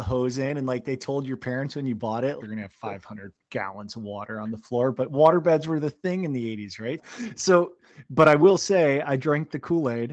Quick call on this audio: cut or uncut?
cut